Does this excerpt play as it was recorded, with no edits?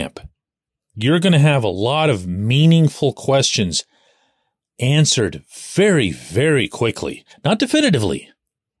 yes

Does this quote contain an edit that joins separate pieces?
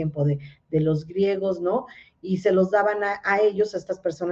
no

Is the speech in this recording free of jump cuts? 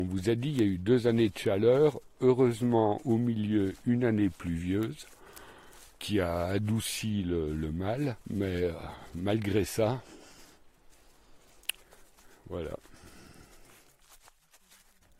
no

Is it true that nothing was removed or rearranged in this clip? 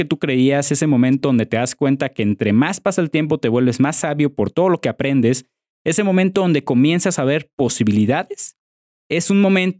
yes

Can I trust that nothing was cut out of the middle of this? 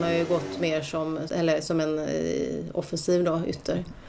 no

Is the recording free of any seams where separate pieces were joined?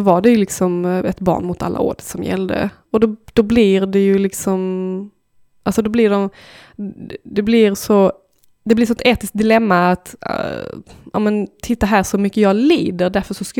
yes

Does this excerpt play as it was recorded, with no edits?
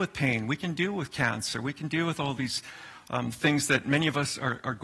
yes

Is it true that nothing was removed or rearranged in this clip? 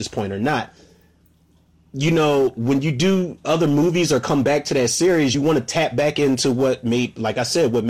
yes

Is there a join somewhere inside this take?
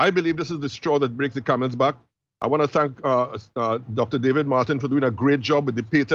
no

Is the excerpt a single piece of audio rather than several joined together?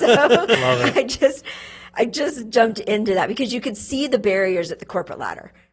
yes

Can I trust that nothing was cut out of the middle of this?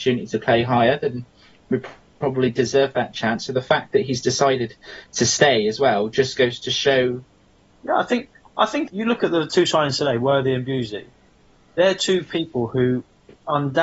no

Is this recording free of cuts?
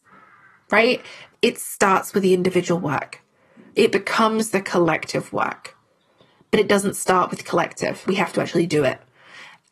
no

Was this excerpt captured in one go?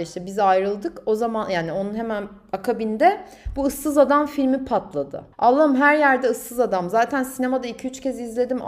no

